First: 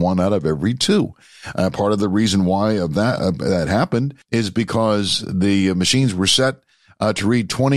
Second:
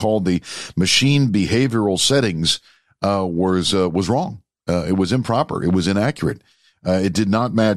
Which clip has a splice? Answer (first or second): first